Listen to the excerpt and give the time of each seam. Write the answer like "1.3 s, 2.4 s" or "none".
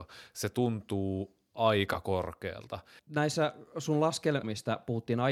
3.0 s, 4.4 s